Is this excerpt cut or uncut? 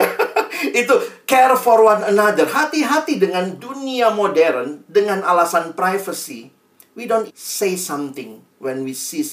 cut